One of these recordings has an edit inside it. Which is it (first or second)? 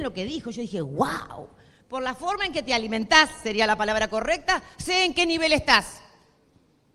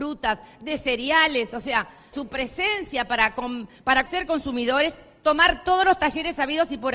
second